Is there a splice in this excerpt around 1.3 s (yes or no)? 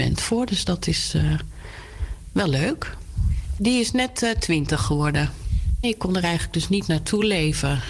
no